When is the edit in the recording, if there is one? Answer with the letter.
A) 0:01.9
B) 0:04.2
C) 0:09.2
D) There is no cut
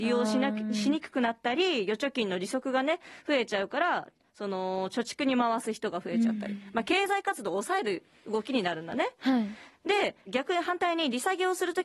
D